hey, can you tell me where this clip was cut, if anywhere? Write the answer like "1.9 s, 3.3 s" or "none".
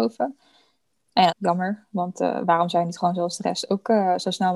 1.3 s

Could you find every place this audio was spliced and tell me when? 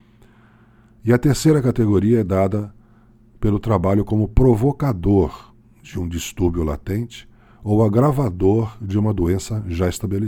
none

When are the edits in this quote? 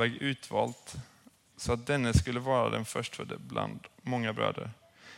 1.5 s

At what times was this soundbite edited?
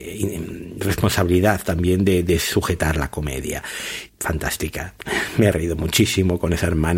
4.1 s

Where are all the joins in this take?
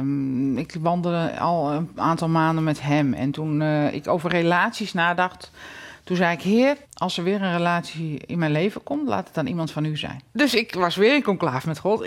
6.8 s, 10.3 s

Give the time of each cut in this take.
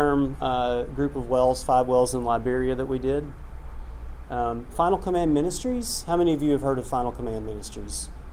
none

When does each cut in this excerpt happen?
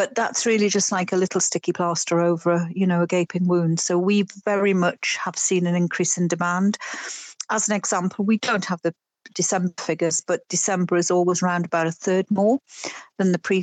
none

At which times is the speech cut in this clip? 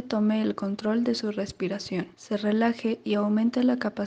2.1 s

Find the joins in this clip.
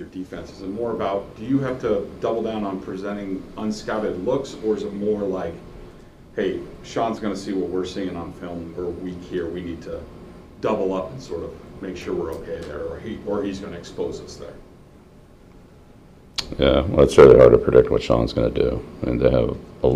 none

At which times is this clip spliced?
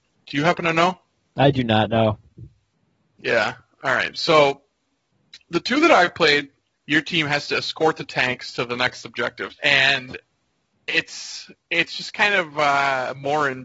6.7 s, 9.5 s

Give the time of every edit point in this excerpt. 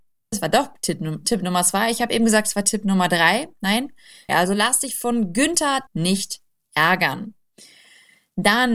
4.3 s, 5.9 s

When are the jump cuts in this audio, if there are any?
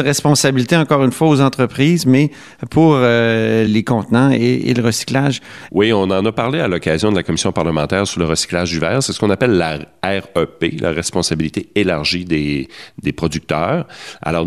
3.7 s, 5.7 s

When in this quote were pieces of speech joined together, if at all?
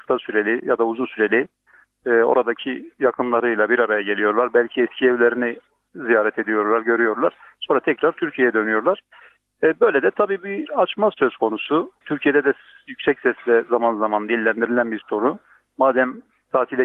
none

